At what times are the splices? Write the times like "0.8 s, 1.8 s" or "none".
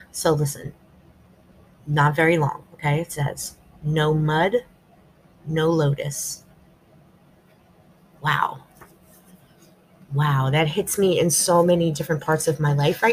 none